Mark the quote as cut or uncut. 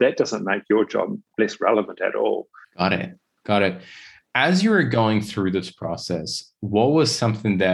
cut